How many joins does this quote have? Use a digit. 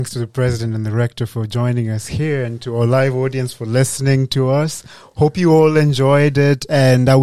0